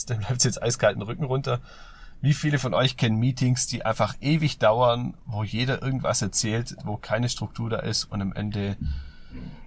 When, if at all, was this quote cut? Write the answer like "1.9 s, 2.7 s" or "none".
none